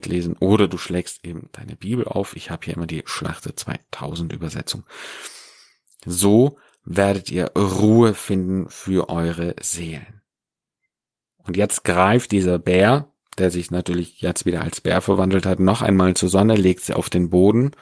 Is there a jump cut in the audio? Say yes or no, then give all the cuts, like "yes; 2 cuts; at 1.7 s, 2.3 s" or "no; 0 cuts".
no; 0 cuts